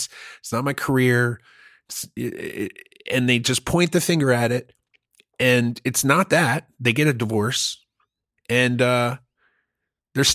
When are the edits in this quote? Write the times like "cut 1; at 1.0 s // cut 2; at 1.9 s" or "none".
none